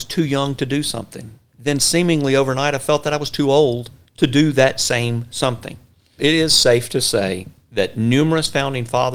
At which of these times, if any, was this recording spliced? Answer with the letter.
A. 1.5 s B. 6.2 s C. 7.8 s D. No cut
B